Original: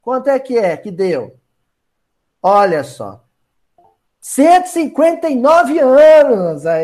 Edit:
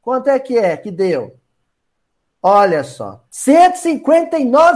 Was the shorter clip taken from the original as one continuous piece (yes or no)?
no